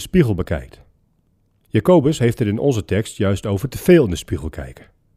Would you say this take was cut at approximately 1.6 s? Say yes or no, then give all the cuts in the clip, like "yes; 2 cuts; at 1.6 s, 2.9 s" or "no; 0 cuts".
yes; 1 cut; at 1.6 s